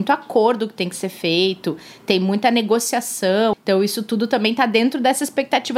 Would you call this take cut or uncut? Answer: cut